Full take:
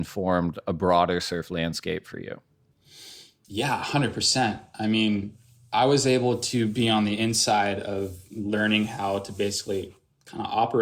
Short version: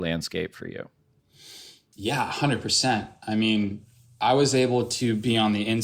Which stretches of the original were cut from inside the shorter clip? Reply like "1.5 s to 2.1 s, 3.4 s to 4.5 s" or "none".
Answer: none